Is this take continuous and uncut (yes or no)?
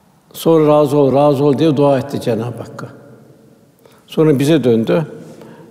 no